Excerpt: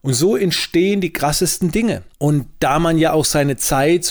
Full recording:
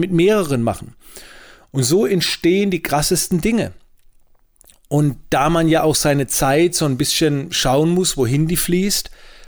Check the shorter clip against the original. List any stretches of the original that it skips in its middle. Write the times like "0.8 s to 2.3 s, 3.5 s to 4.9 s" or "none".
3.8 s to 4.8 s